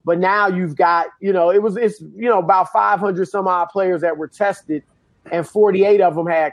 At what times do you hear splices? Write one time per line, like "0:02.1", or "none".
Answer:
none